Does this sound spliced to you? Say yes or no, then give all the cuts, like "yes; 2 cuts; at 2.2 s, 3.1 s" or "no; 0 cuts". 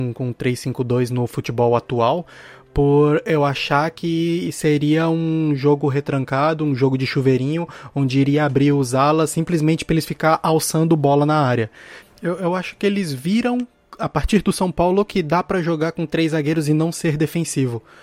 yes; 1 cut; at 12.0 s